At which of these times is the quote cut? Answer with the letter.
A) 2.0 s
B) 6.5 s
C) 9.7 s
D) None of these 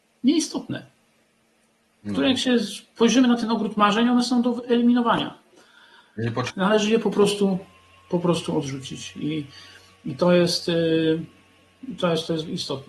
B